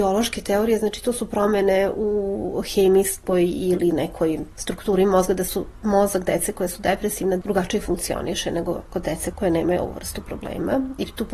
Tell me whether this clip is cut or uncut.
uncut